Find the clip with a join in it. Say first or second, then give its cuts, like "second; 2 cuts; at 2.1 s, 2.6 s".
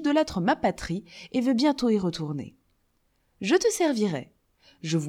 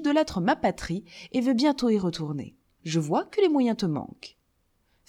second; 1 cut; at 2.8 s